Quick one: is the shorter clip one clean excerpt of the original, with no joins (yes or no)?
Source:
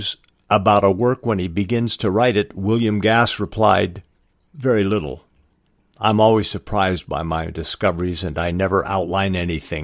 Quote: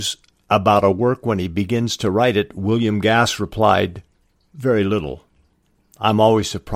yes